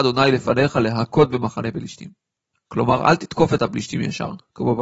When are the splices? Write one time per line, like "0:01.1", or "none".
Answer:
none